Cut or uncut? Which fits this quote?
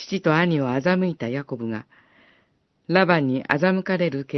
uncut